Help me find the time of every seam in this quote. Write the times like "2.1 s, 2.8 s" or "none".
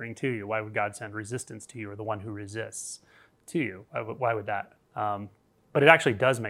4.8 s